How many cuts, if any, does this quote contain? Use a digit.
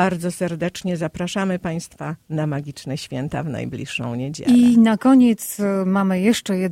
0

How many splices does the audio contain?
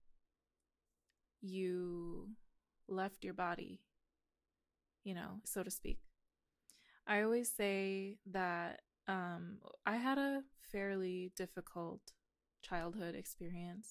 1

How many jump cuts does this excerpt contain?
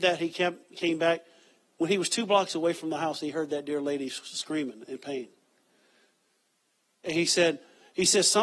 0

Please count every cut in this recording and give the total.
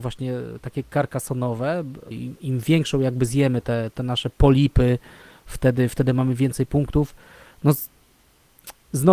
1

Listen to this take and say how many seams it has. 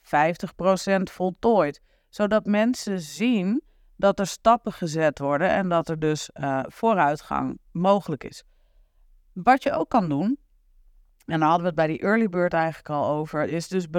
0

